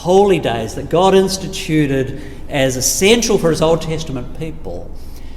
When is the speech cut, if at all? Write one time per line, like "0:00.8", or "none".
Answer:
none

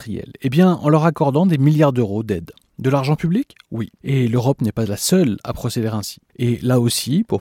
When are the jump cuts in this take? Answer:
0:06.3

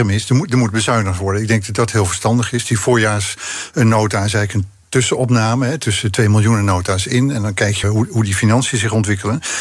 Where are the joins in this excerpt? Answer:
0:07.8

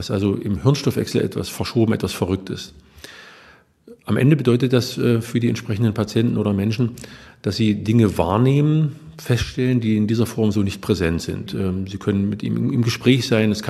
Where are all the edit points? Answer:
0:11.5

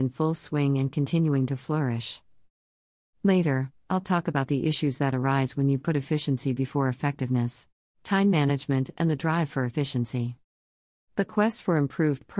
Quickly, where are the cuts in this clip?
0:07.9

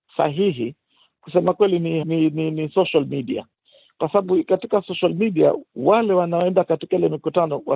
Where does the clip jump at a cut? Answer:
0:02.0
0:05.7

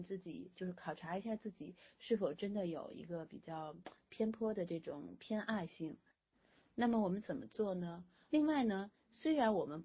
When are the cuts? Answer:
0:08.3

